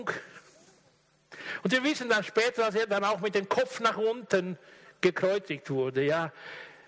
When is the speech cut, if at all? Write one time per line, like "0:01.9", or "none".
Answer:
none